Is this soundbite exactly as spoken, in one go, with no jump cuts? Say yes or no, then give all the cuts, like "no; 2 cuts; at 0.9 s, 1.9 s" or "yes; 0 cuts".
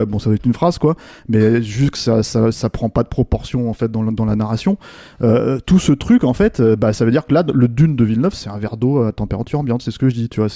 yes; 0 cuts